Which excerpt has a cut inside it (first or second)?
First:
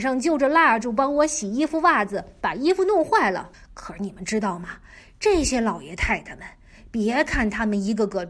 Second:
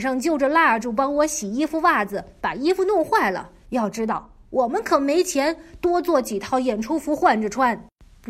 first